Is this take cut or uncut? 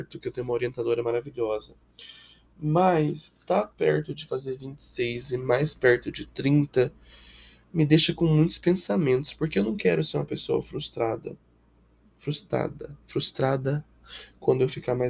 uncut